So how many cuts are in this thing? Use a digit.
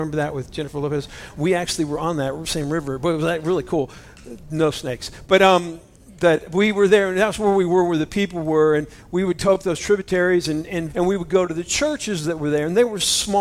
1